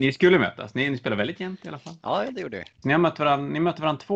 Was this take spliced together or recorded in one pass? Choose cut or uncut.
cut